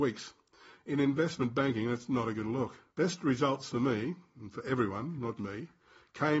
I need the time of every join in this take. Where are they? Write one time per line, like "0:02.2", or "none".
0:02.9
0:05.4